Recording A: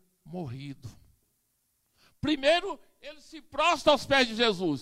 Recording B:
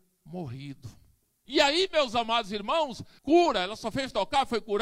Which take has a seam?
B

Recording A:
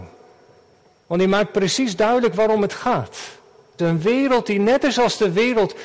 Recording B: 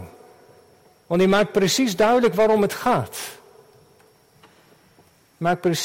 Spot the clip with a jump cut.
A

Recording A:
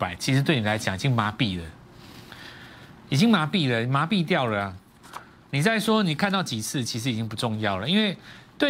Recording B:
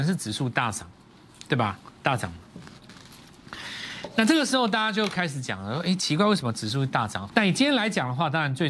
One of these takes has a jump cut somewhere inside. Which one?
B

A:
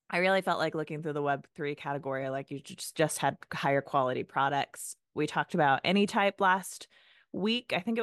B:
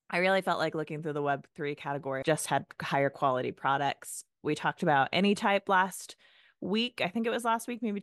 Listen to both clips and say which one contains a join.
B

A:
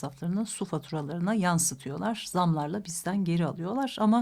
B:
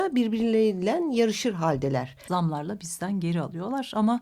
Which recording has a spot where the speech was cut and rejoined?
B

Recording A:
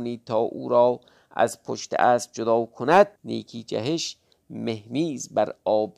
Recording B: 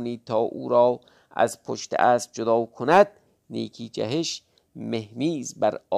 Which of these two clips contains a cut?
A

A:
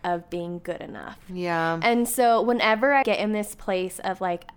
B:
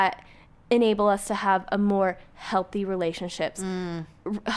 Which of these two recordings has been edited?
A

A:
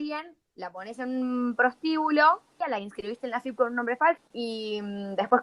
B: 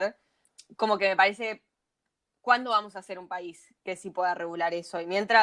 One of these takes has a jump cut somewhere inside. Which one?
A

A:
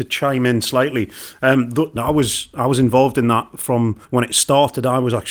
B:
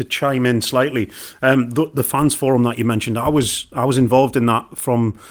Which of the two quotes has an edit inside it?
A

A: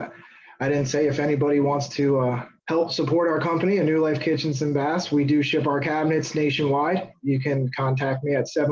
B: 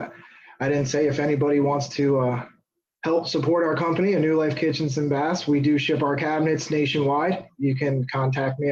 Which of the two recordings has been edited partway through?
A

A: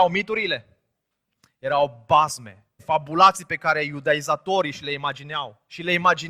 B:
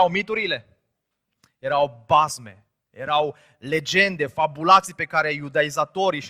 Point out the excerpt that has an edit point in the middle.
A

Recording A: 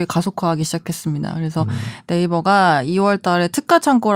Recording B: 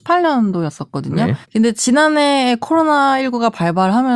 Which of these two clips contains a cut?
B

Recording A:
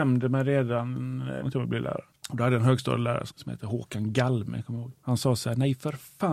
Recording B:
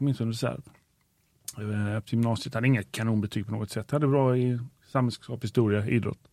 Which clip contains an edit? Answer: A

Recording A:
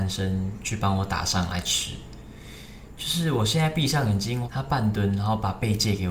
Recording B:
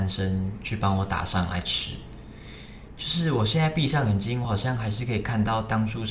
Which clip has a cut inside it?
A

